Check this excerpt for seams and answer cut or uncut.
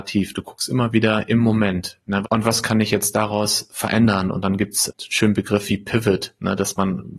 cut